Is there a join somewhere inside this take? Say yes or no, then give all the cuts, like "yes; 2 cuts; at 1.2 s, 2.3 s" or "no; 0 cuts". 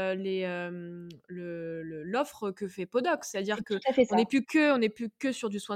no; 0 cuts